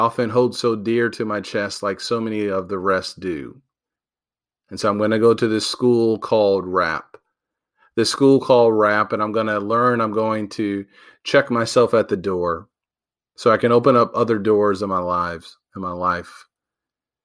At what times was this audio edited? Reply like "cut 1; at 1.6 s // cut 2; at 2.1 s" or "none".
none